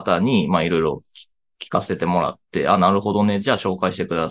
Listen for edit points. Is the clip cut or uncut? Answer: uncut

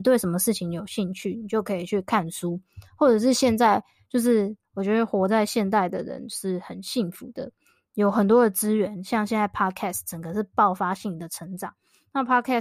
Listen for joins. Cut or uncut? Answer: uncut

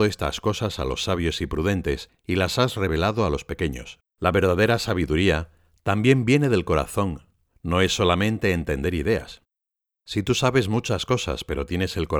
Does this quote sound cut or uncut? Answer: cut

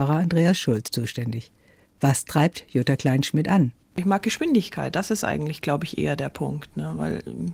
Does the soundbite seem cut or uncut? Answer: uncut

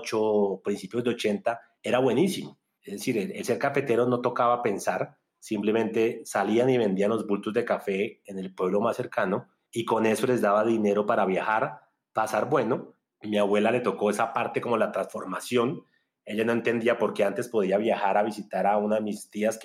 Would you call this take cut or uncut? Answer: uncut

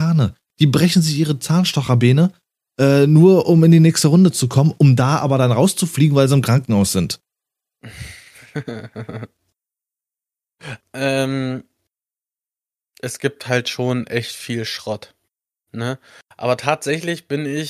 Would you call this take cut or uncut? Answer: cut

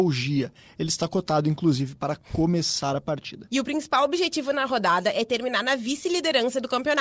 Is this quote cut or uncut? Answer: uncut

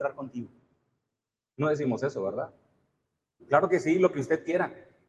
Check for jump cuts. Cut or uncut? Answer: cut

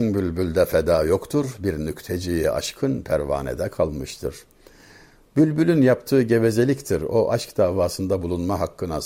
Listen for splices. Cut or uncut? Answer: uncut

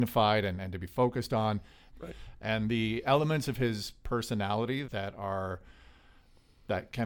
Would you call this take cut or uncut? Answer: cut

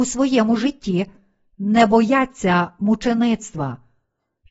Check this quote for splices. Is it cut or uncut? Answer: uncut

